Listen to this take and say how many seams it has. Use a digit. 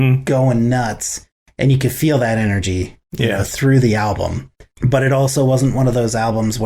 0